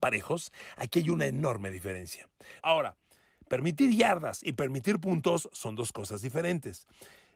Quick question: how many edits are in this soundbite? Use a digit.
1